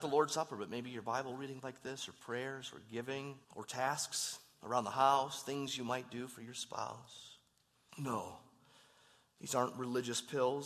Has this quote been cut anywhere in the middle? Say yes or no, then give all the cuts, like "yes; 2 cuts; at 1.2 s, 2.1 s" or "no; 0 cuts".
yes; 2 cuts; at 3.4 s, 7.9 s